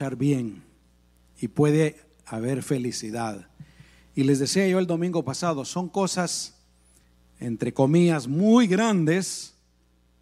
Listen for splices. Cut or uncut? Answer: uncut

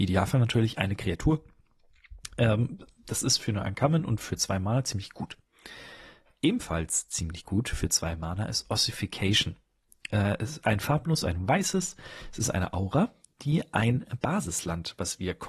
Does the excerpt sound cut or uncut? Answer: uncut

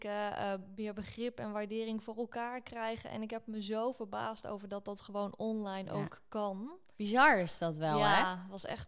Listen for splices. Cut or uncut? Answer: uncut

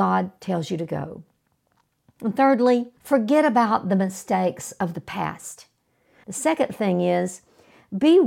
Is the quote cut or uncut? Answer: cut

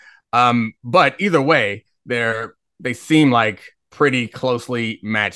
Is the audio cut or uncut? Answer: uncut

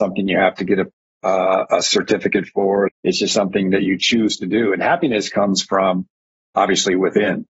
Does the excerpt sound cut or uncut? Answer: cut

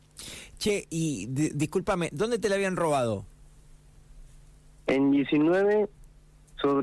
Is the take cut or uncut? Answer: uncut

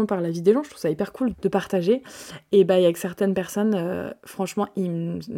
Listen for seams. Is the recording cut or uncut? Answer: cut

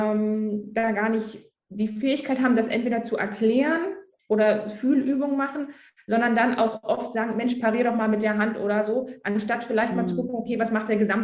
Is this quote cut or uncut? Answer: cut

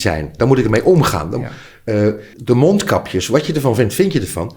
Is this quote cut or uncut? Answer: cut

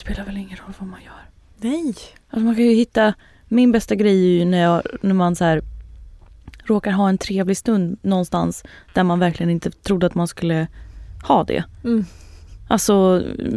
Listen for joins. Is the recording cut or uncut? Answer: uncut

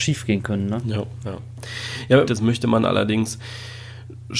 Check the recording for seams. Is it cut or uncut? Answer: cut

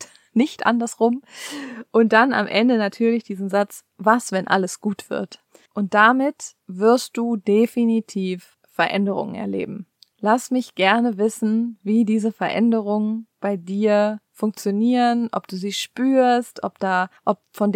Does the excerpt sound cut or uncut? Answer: uncut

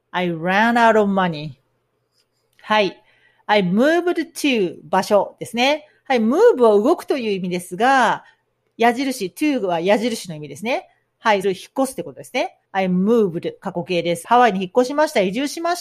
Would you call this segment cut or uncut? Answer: cut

